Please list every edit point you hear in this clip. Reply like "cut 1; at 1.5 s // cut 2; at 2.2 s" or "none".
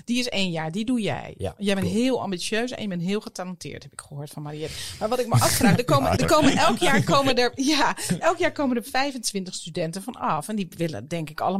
cut 1; at 6.2 s